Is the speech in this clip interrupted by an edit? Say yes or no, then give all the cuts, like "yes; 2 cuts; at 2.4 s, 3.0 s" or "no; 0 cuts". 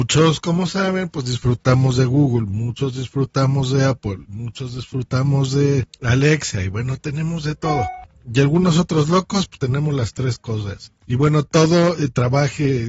yes; 2 cuts; at 9.5 s, 11.0 s